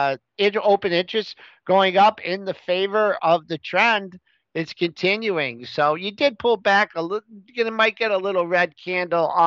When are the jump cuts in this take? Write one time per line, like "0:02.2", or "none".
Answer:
0:03.2